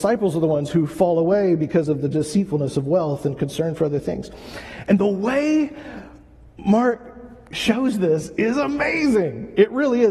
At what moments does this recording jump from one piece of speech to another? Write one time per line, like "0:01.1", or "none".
none